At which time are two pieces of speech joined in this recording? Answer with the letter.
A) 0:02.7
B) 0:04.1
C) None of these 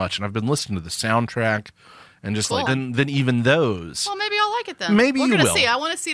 A